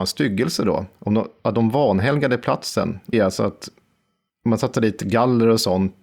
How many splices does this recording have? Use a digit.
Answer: 1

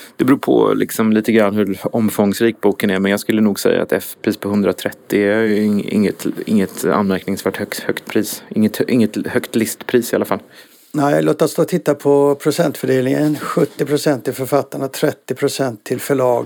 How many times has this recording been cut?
0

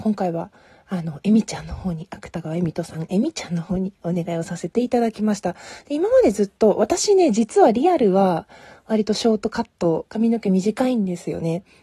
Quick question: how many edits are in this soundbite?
0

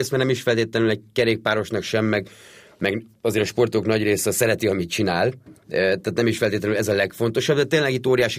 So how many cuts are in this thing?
0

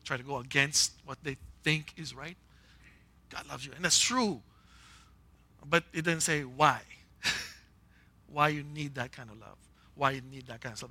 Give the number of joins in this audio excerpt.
1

